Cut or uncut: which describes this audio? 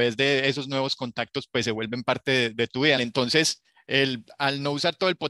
cut